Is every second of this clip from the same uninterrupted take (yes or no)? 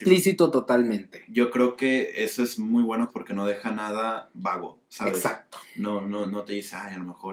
no